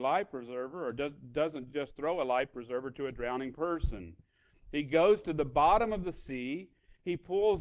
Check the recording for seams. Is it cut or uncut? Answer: uncut